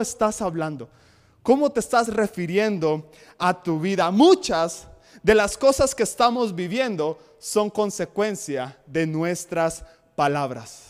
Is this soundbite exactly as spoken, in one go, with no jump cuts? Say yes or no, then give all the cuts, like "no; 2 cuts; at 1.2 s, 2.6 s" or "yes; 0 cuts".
yes; 0 cuts